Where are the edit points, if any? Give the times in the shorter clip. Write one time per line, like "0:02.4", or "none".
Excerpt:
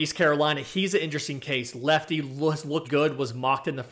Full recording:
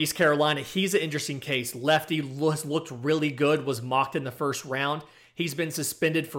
0:02.8